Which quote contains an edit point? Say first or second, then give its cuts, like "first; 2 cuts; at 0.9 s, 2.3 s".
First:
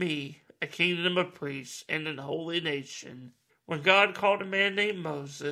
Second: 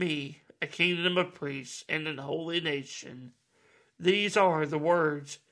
first; 1 cut; at 3.5 s